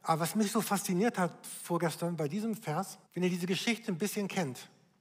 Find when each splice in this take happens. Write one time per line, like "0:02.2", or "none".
0:03.1